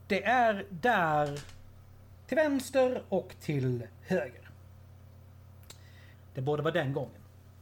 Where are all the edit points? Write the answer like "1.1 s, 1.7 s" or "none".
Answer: 2.2 s, 6.1 s